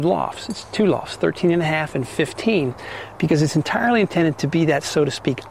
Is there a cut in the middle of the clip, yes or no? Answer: no